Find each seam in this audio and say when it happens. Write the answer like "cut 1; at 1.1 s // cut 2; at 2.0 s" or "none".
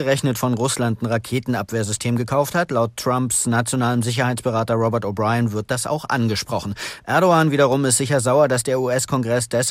none